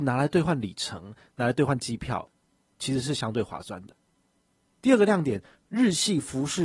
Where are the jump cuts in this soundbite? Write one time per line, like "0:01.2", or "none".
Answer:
none